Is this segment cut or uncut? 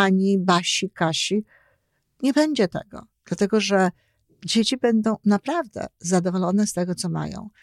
uncut